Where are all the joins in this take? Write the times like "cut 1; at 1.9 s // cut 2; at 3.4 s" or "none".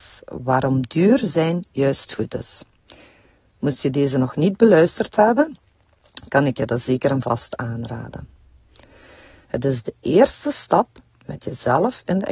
cut 1; at 9.4 s